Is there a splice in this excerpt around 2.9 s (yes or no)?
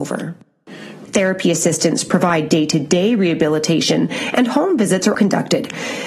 no